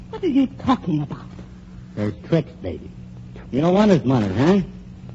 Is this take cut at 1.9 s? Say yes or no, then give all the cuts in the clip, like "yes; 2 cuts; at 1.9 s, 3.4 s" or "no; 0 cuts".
no; 1 cut; at 3.4 s